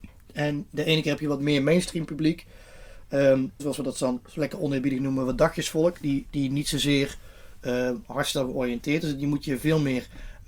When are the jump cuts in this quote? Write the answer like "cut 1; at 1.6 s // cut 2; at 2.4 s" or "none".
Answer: cut 1; at 3.6 s